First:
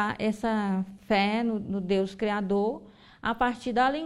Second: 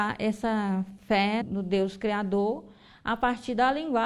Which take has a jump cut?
second; 1 cut; at 1.4 s

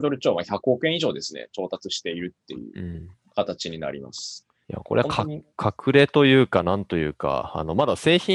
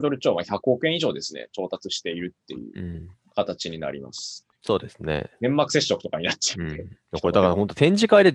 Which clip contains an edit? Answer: second; 1 cut; at 4.5 s

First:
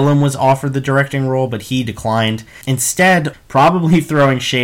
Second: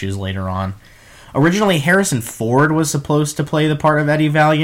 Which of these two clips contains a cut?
first; 1 cut; at 3.3 s

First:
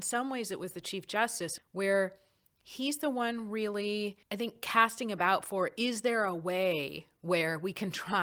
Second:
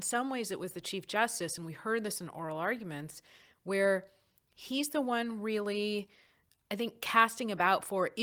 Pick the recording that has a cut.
first; 2 cuts; at 1.6 s, 4.2 s

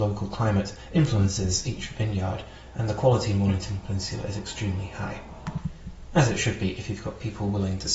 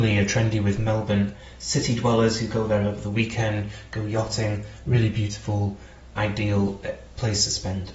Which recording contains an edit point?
second; 1 cut; at 6.2 s

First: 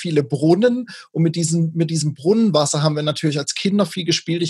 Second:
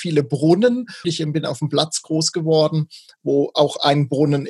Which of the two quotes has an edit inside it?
second; 1 cut; at 1.0 s

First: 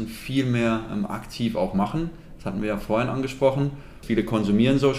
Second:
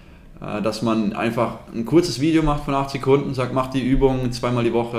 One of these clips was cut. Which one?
first; 1 cut; at 4.0 s

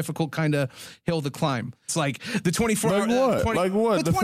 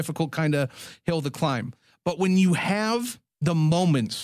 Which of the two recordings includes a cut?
first; 1 cut; at 1.9 s

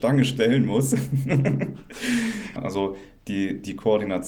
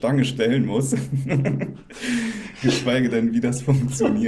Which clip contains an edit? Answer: first; 1 cut; at 2.6 s

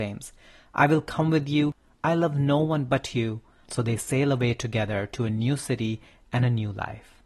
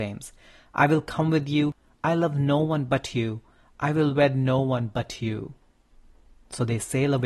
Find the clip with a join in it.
first; 1 cut; at 3.6 s

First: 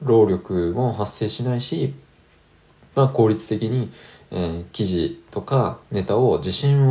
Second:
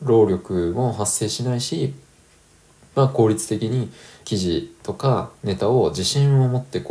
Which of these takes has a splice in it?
second; 1 cut; at 4.2 s

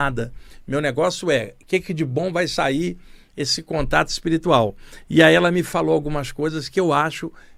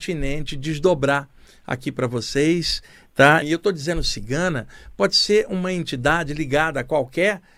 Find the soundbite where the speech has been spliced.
second; 1 cut; at 3.4 s

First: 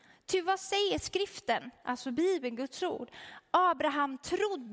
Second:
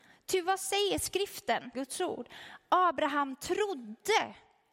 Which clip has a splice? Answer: second; 1 cut; at 1.7 s

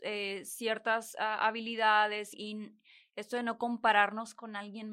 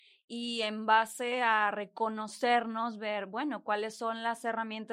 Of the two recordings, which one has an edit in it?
first; 1 cut; at 2.3 s

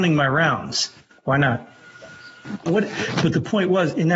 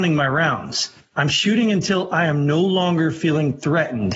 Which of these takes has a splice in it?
first; 2 cuts; at 1.1 s, 2.7 s

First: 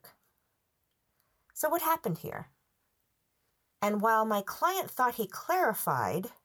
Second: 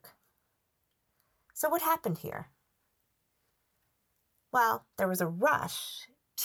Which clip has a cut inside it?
first; 1 cut; at 3.7 s

